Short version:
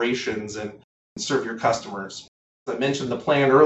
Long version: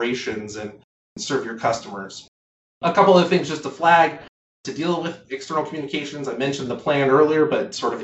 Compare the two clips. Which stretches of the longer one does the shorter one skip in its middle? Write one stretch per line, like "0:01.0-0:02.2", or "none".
0:02.7-0:06.3